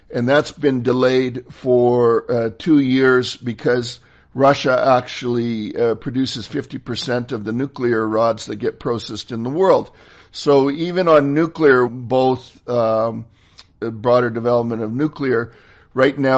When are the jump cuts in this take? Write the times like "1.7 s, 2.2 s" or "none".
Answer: 11.9 s, 13.7 s